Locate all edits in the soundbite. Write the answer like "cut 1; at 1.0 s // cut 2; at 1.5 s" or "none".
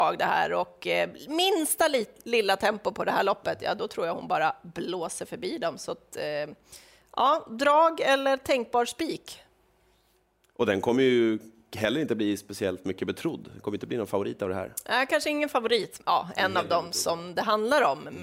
cut 1; at 16.0 s